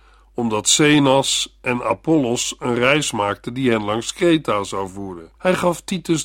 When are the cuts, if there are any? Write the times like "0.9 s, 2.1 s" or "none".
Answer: 5.3 s